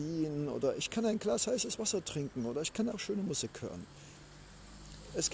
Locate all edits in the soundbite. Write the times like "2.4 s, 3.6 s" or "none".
2.9 s